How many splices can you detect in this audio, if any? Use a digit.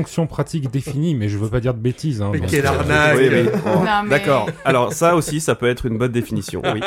0